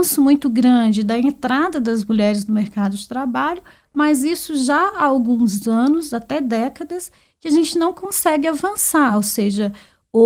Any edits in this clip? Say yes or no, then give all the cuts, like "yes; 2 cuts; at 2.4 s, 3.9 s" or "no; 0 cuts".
no; 0 cuts